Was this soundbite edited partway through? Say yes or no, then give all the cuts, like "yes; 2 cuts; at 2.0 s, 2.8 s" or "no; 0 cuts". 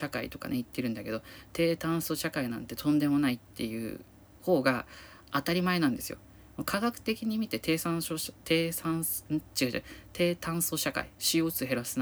no; 0 cuts